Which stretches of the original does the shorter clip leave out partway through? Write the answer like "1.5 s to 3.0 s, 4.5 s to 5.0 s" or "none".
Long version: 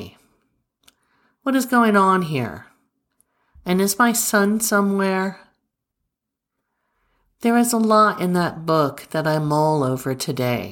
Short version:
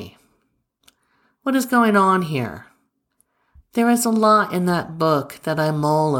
3.6 s to 7.3 s